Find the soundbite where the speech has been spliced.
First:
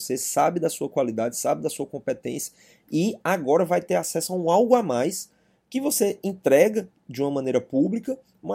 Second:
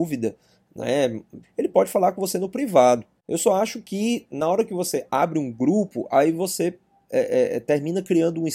second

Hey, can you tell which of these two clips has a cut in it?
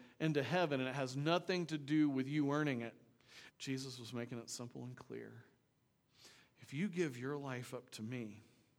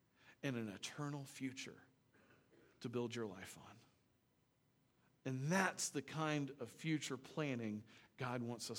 first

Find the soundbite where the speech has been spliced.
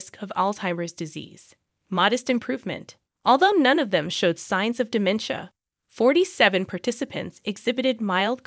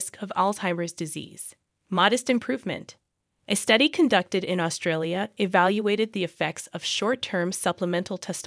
first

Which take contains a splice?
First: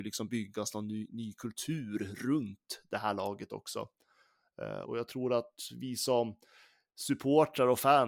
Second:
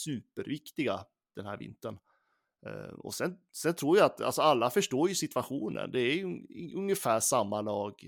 first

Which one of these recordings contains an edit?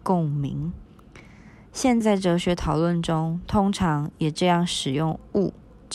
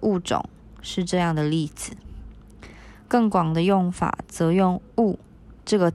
first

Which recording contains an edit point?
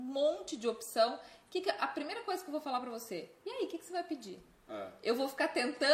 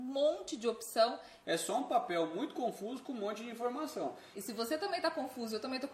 second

